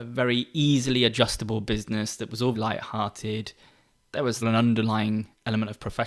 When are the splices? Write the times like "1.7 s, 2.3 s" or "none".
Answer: 2.5 s, 4.4 s